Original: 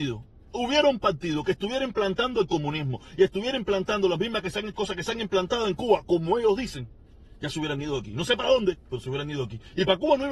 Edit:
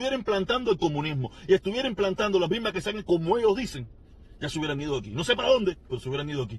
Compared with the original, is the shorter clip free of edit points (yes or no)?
no